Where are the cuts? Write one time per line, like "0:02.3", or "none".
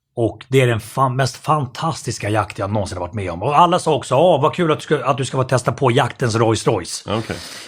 none